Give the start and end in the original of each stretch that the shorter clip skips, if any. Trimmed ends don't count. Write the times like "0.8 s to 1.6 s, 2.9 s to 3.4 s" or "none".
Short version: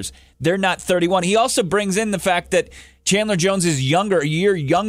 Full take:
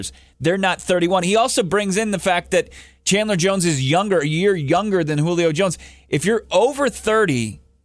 none